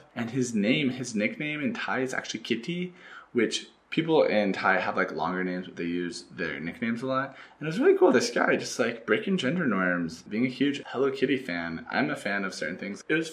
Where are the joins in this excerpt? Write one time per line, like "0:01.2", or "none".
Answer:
none

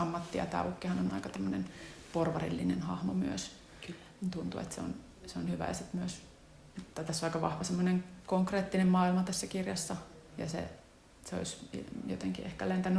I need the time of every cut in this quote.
none

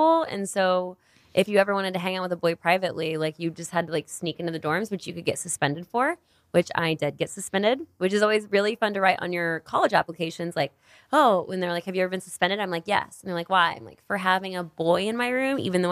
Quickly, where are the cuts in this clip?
none

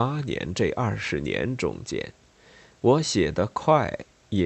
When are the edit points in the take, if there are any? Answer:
none

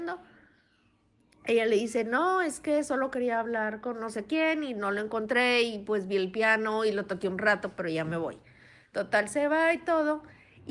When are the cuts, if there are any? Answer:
none

